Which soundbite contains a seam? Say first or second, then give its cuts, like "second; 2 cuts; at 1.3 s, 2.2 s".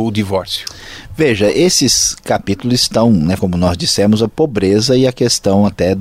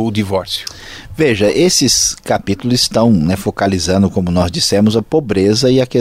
first; 1 cut; at 3.4 s